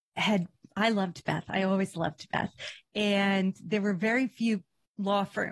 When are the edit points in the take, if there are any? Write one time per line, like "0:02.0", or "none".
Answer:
none